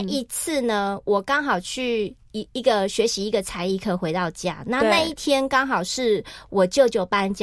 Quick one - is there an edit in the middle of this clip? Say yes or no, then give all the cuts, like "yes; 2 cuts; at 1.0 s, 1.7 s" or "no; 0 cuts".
no; 0 cuts